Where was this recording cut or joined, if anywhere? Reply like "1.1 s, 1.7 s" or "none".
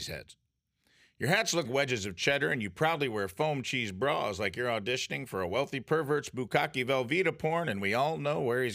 1.6 s